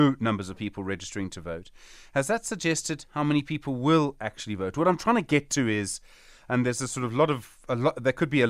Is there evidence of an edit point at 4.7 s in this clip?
no; 0 cuts

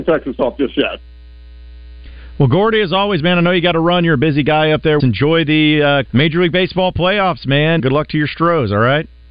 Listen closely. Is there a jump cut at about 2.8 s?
no; 3 cuts; at 5.0 s, 6.1 s, 7.8 s

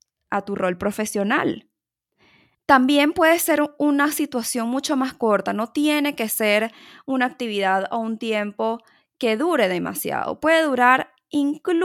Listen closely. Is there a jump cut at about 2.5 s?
yes; 1 cut; at 2.5 s

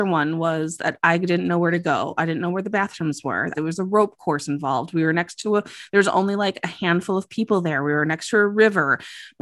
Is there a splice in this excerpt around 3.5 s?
yes; 1 cut; at 3.5 s

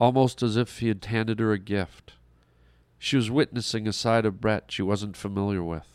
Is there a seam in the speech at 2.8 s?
no; 1 cut; at 1.0 s

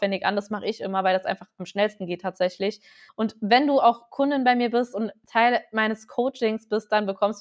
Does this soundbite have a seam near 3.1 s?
yes; 1 cut; at 3.1 s

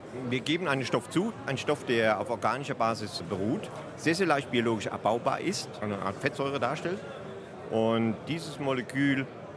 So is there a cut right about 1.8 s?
no; 0 cuts

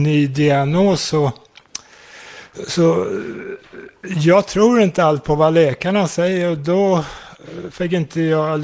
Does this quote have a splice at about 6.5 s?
no; 0 cuts

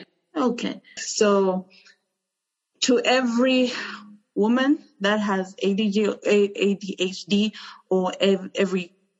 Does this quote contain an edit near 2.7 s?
no; 1 cut; at 1.0 s

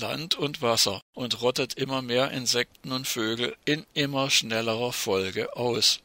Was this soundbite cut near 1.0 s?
yes; 1 cut; at 1.0 s

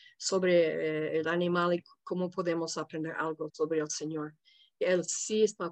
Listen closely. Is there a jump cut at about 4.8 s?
no; 1 cut; at 3.5 s

